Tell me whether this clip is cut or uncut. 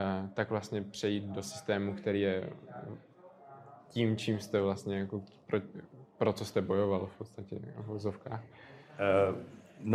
uncut